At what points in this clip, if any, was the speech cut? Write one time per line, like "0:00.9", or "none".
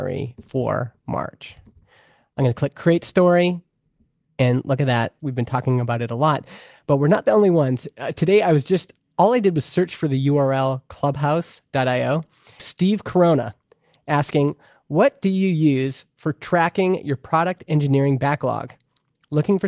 0:05.2
0:12.6